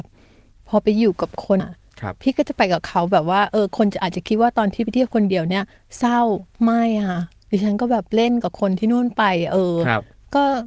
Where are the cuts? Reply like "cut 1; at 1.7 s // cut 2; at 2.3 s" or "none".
cut 1; at 1.6 s // cut 2; at 6.5 s